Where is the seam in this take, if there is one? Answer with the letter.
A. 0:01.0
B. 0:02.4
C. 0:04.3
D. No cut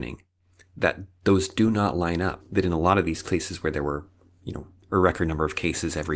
B